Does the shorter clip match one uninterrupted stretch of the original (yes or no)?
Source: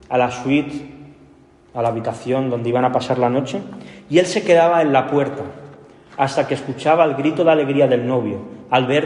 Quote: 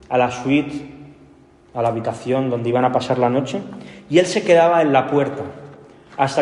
yes